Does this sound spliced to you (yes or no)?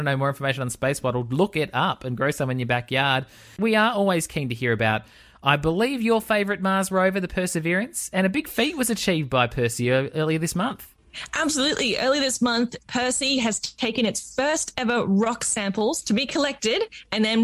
no